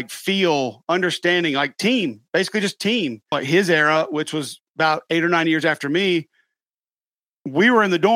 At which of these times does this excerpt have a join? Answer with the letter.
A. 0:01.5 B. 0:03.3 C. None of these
B